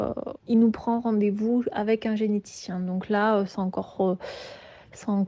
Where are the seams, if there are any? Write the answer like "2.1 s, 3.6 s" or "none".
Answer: none